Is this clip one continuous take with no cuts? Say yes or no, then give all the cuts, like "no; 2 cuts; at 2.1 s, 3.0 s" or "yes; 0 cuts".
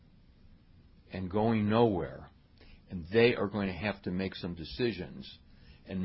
yes; 0 cuts